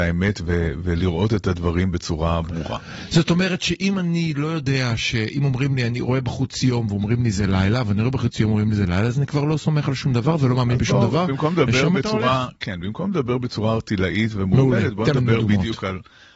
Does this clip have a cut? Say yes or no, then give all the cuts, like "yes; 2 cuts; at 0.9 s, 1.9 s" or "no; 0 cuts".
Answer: no; 0 cuts